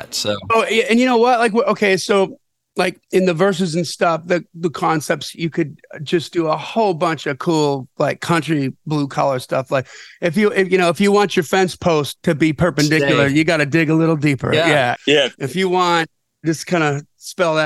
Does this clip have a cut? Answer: yes; 1 cut; at 15.0 s

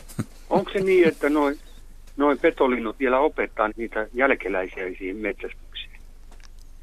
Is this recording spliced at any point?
yes; 1 cut; at 3.7 s

